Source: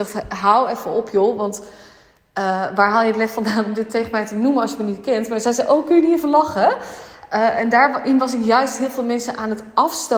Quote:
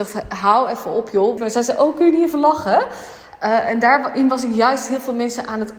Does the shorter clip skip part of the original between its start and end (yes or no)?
yes